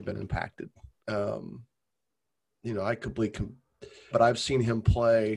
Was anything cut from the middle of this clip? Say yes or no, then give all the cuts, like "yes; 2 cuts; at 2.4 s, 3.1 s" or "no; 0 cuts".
yes; 2 cuts; at 1.0 s, 4.1 s